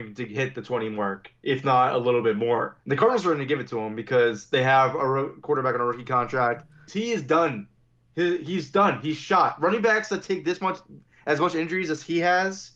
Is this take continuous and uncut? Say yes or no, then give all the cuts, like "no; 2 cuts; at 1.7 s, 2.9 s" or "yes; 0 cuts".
no; 2 cuts; at 2.8 s, 6.9 s